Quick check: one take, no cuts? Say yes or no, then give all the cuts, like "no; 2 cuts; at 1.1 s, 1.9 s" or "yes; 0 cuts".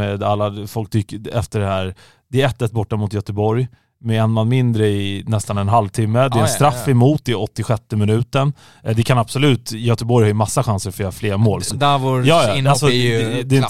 no; 1 cut; at 11.7 s